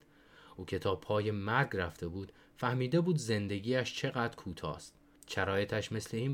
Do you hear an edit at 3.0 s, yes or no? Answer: no